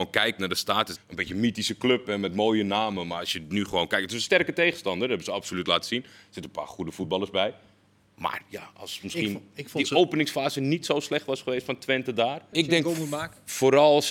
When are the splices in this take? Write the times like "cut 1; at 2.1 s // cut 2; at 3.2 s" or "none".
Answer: cut 1; at 1.0 s // cut 2; at 12.5 s